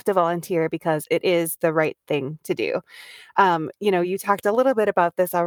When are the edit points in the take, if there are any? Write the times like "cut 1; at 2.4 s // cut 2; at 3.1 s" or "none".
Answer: none